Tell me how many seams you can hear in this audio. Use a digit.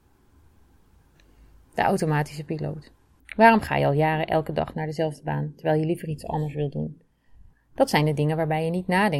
2